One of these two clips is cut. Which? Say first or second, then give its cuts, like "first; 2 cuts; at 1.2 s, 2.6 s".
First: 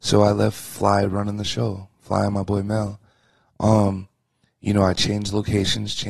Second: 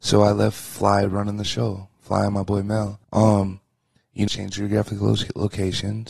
second; 2 cuts; at 3.0 s, 4.3 s